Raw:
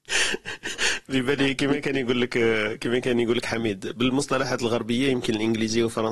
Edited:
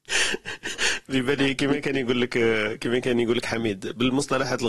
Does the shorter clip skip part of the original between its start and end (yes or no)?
no